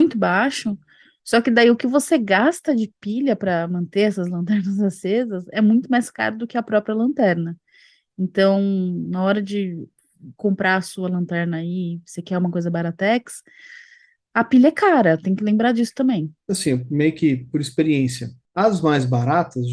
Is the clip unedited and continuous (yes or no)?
yes